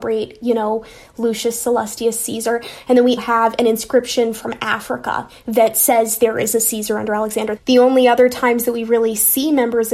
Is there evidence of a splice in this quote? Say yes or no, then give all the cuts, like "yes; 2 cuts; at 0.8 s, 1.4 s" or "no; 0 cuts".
yes; 2 cuts; at 3.2 s, 7.6 s